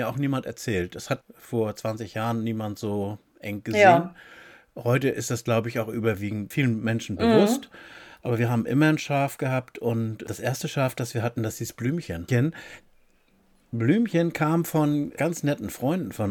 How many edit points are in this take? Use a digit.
2